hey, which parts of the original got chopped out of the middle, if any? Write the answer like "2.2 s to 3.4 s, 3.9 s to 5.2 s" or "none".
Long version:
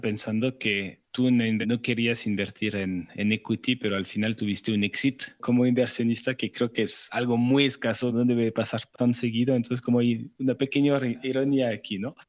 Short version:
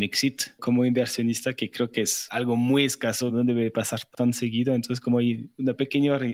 none